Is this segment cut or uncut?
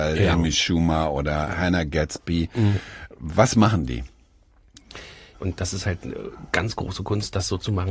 cut